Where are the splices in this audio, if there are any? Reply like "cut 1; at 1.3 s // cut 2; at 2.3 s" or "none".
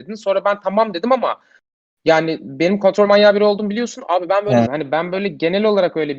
cut 1; at 4.6 s